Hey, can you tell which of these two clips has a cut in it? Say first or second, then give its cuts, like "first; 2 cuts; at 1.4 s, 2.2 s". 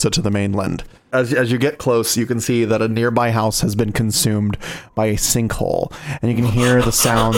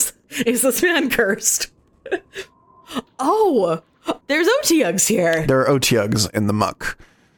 second; 1 cut; at 4.2 s